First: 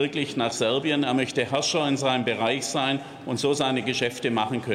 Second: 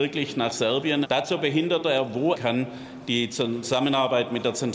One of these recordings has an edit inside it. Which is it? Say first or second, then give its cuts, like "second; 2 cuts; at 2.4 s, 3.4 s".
second; 2 cuts; at 1.0 s, 2.3 s